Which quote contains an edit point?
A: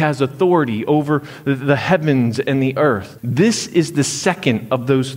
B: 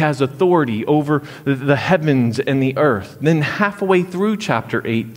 A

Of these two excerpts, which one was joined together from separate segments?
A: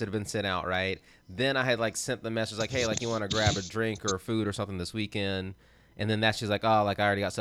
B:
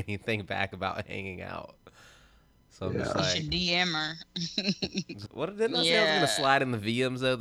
B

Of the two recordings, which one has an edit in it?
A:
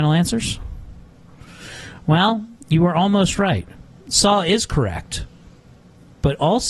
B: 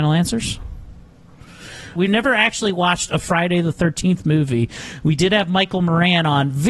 B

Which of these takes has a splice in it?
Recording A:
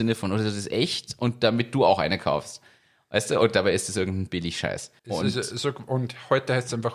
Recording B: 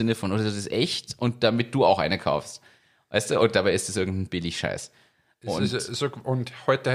A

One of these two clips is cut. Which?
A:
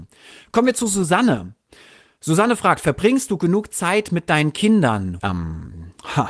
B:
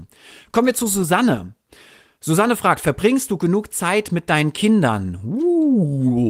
A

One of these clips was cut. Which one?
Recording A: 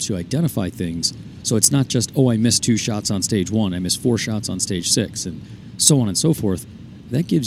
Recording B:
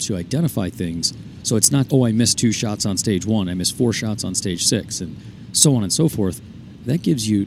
B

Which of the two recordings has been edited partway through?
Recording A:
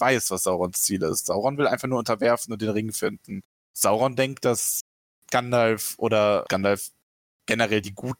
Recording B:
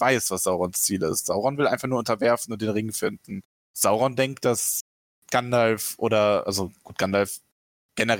A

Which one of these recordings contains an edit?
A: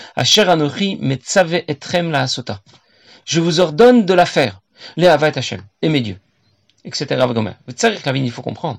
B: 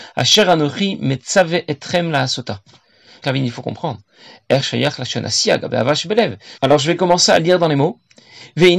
B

